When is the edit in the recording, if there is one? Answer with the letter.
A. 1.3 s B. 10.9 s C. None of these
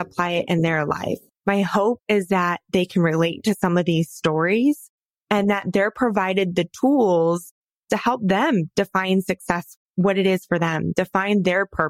A